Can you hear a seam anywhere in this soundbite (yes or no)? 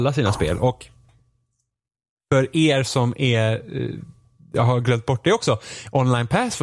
no